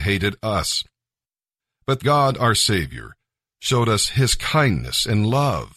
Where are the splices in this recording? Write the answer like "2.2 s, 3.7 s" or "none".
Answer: 2.0 s

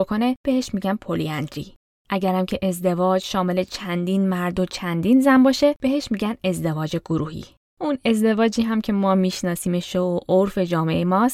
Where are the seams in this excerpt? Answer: none

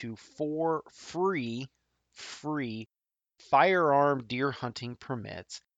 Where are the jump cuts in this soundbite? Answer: 2.1 s

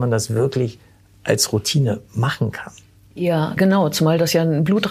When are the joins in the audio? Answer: 3.6 s

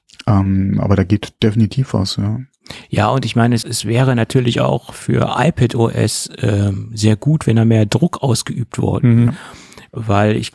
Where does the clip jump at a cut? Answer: 3.6 s, 9.3 s

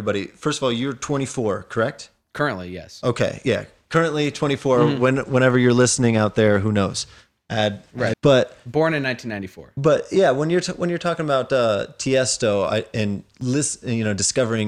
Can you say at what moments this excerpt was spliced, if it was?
8.1 s

